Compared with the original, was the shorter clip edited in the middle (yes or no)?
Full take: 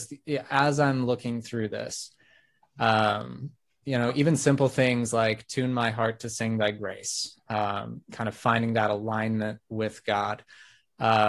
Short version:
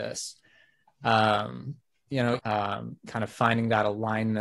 yes